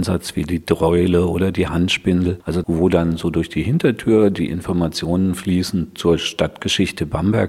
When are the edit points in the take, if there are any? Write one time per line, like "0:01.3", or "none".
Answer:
0:02.6

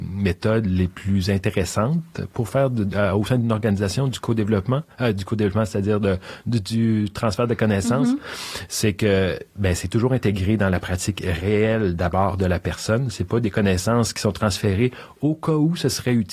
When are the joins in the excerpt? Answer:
none

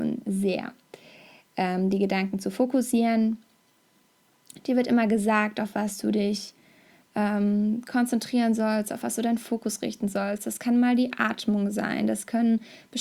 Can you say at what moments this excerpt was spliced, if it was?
none

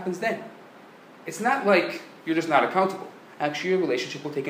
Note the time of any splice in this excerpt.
none

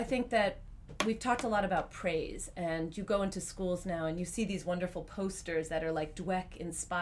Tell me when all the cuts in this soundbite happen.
none

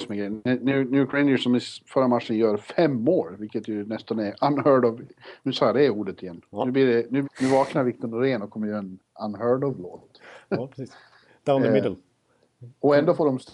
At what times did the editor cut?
0:07.2

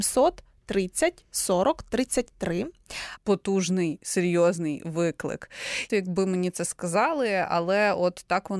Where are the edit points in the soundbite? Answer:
0:03.2
0:05.9

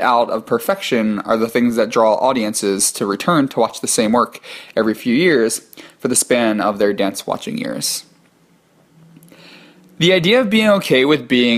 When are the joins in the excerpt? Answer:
none

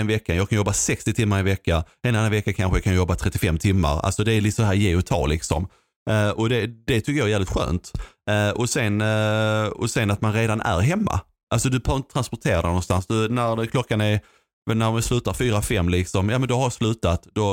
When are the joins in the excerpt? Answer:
none

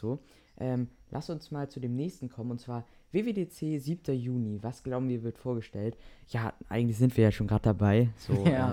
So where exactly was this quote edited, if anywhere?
none

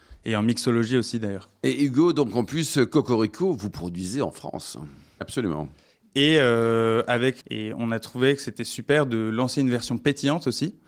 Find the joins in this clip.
0:05.2
0:07.4

